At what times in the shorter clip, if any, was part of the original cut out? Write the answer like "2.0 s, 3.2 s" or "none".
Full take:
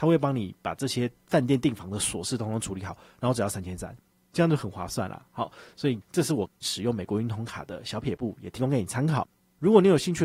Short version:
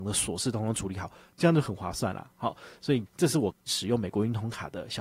1.3 s